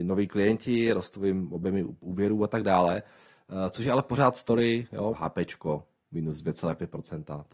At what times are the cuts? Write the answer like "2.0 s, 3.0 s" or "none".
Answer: 5.1 s

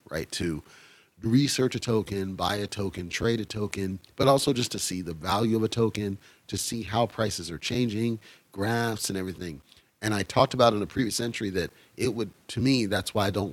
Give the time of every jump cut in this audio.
none

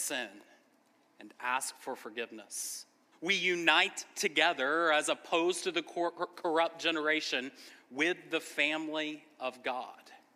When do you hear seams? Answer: 3.1 s

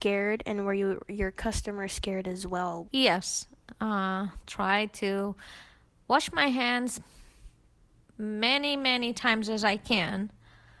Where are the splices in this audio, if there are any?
2.8 s

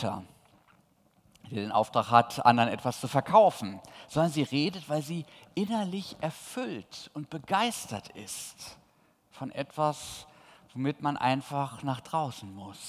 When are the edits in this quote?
none

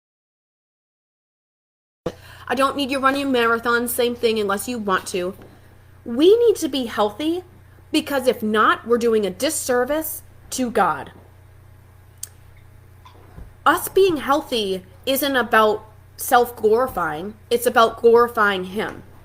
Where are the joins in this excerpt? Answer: none

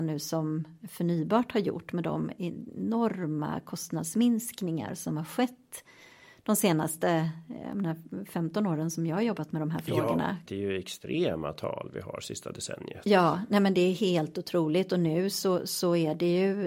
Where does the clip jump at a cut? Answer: 10.5 s

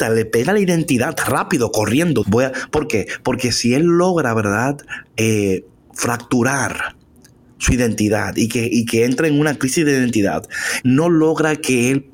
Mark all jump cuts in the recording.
2.2 s, 10.8 s

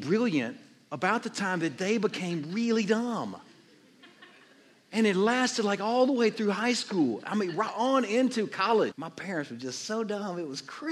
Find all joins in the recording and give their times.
8.9 s

